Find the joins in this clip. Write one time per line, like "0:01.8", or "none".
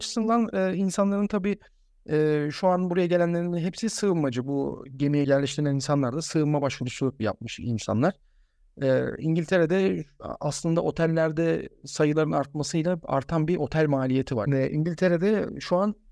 0:05.2
0:14.5